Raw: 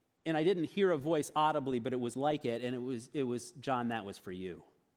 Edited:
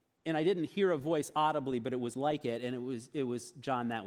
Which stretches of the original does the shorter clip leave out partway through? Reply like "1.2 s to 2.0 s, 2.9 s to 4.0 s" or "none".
none